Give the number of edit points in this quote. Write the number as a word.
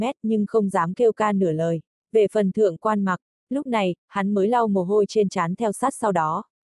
one